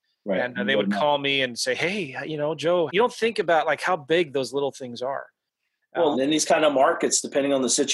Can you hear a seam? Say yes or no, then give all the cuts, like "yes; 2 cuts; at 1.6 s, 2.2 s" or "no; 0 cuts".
yes; 2 cuts; at 2.9 s, 6.1 s